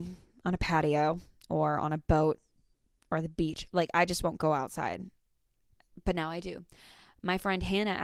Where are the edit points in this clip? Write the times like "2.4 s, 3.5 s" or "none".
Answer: none